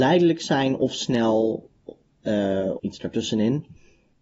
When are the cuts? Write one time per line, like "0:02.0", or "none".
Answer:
0:02.8